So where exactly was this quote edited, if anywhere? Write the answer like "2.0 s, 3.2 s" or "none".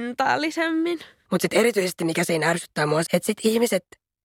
1.3 s, 3.1 s